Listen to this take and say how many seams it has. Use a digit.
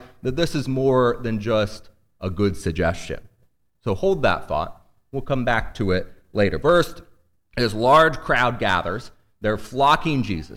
1